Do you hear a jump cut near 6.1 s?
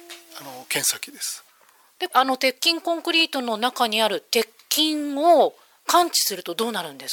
no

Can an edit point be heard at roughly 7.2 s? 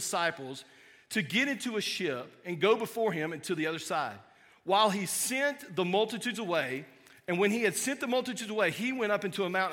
no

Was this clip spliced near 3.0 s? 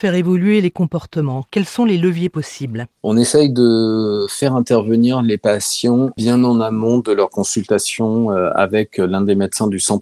yes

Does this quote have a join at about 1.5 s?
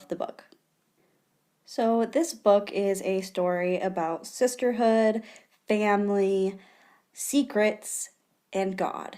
no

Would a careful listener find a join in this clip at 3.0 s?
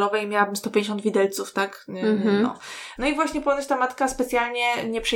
yes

